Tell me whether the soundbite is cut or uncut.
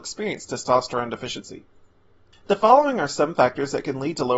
cut